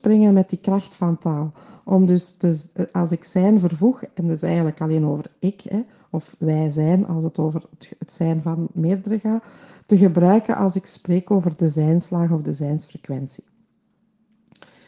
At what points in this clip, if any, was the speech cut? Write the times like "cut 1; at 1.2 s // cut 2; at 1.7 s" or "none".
none